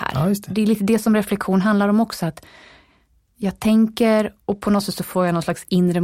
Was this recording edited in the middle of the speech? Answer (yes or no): yes